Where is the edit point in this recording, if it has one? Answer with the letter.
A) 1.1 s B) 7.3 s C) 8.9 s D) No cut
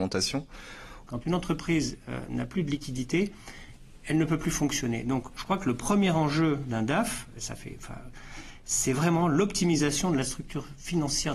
A